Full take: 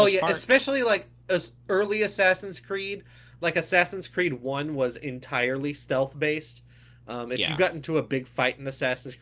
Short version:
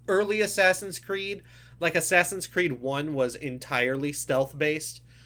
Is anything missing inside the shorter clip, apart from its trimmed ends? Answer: no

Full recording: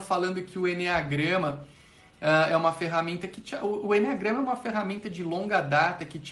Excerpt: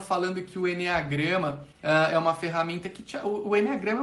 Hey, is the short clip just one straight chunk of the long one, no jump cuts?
no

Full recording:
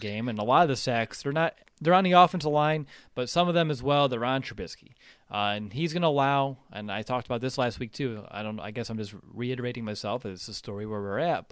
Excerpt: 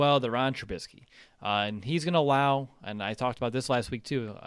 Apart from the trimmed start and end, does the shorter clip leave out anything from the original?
no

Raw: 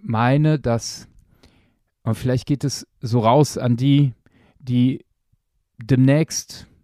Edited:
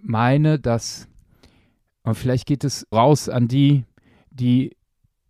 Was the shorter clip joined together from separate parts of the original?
yes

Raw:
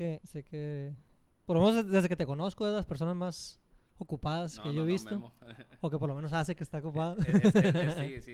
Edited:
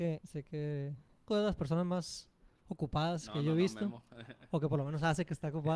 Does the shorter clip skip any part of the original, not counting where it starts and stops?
yes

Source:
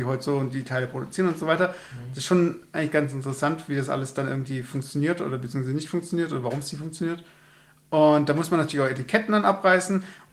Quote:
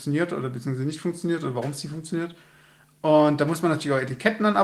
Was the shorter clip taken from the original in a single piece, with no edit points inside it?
yes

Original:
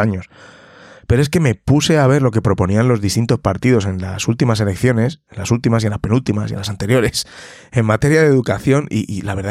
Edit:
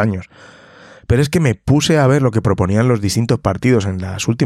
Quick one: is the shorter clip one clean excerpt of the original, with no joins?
yes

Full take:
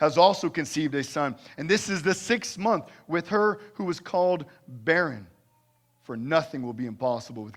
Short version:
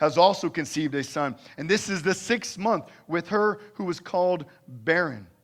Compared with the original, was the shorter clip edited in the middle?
no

